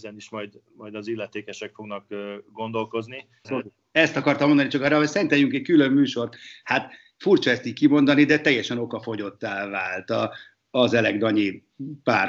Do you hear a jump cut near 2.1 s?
no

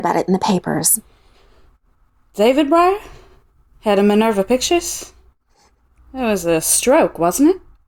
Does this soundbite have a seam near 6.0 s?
yes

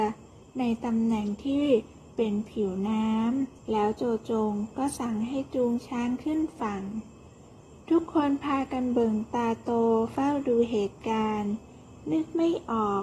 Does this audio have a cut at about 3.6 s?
yes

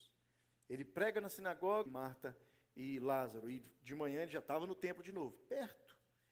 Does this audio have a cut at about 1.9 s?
yes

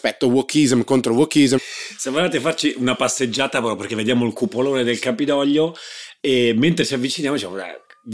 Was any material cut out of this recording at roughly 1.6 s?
yes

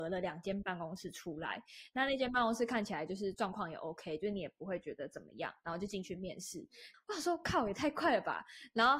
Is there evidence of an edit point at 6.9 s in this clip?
yes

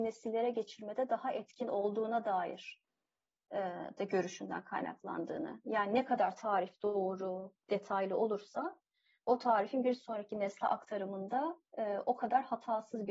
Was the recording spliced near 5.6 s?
no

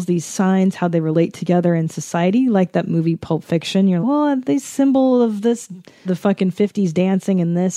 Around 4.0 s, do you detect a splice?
yes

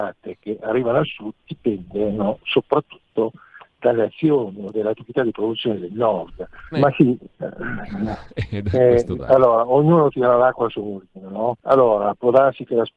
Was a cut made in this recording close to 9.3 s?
no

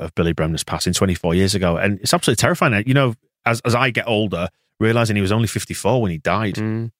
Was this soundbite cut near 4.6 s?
no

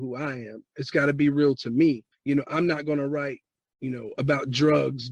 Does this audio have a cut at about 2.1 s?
yes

